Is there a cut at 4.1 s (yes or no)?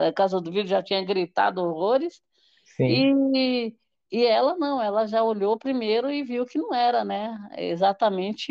yes